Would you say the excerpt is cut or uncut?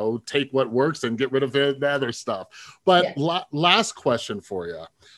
uncut